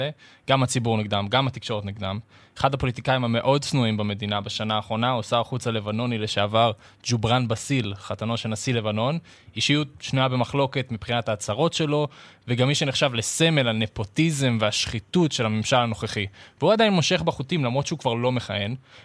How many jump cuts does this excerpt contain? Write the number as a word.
zero